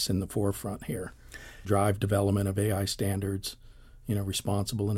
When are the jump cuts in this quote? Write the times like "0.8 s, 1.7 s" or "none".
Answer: 1.6 s